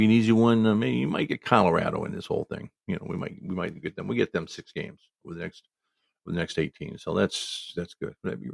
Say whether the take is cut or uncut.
uncut